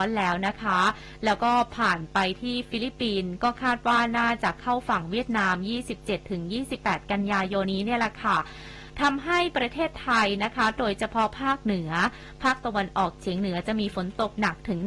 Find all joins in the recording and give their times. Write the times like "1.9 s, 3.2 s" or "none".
7.6 s